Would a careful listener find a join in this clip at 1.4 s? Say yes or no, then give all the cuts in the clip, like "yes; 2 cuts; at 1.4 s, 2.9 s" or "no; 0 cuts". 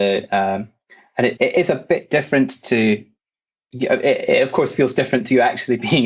yes; 1 cut; at 1.4 s